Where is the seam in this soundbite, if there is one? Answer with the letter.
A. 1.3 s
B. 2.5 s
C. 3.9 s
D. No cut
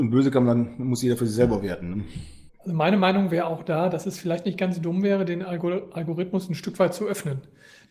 B